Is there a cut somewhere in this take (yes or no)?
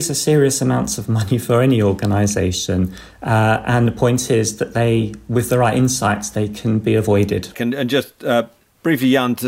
yes